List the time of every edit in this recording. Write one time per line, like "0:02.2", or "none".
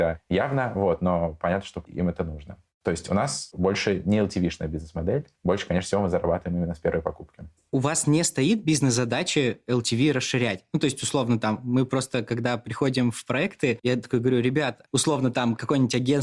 none

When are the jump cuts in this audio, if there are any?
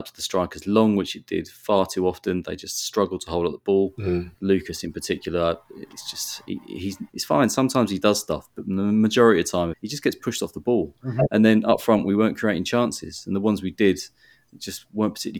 0:07.1
0:09.7

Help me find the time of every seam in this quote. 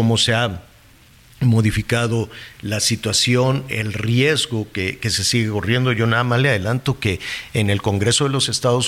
none

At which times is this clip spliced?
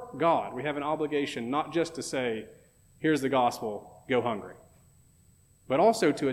none

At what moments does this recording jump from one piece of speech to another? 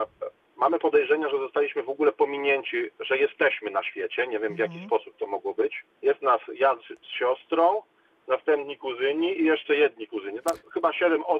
0:05.9

